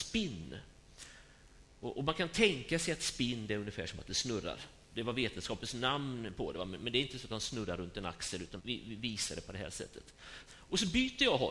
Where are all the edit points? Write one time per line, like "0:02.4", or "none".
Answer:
0:08.6
0:10.5

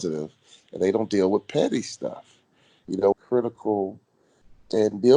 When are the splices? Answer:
0:03.1

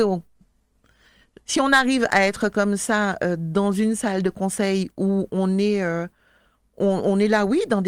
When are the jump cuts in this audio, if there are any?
0:01.4

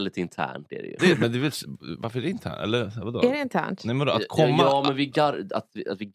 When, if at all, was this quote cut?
0:01.0

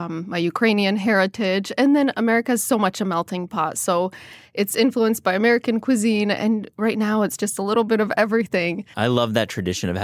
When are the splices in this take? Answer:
0:08.9

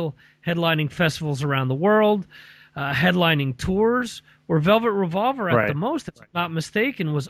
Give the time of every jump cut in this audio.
none

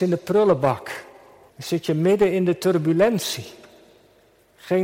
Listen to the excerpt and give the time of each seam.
0:01.5

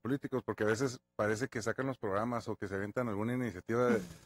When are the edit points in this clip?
none

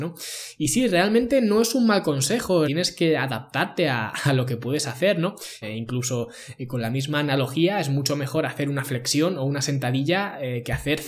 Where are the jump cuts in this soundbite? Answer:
0:02.6
0:05.6

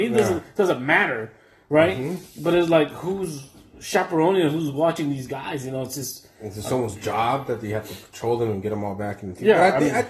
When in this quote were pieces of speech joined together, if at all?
none

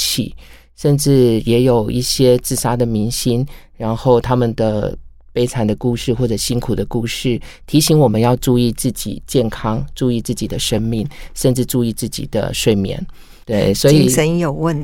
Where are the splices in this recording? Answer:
0:13.4

